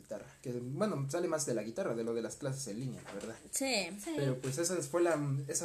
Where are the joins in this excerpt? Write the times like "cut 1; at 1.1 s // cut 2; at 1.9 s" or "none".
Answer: none